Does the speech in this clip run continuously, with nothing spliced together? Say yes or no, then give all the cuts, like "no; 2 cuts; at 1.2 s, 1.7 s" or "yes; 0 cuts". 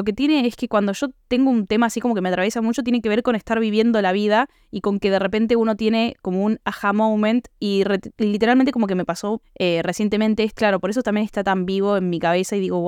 no; 2 cuts; at 9.4 s, 10.5 s